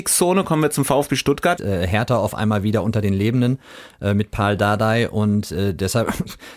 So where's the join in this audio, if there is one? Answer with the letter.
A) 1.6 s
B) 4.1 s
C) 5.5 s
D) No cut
A